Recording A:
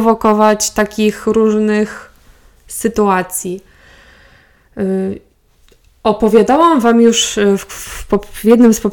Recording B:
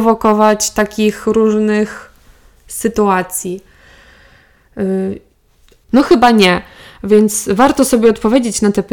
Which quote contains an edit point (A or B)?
B